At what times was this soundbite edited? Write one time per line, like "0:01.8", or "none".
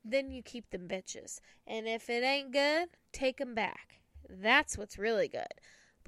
none